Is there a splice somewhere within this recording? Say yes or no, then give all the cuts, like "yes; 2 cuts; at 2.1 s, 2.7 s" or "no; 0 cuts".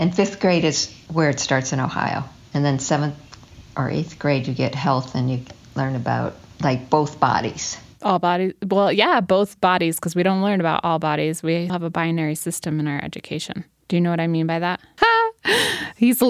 yes; 2 cuts; at 11.7 s, 15.0 s